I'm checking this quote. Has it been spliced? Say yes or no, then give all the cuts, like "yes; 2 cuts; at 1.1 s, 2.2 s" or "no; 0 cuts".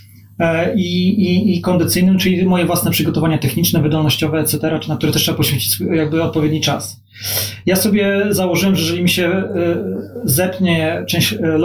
no; 0 cuts